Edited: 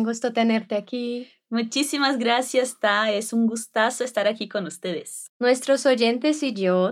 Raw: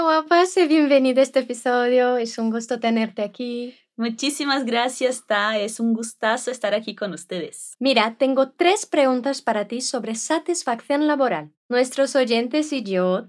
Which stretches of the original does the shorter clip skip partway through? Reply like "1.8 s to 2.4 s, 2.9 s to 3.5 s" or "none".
7.8 s to 11.6 s